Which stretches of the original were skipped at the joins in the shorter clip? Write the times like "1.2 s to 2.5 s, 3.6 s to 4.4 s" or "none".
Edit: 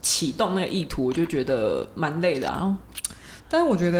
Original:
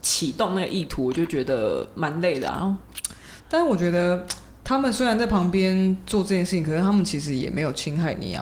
none